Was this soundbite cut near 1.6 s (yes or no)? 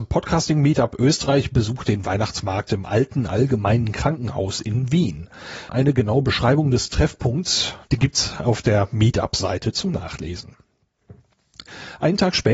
no